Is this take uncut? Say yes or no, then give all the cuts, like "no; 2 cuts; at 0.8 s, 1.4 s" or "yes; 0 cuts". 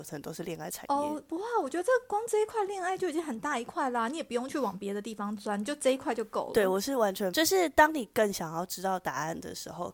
no; 1 cut; at 7.3 s